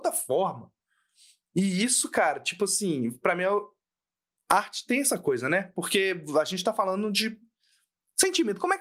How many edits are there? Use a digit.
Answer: 0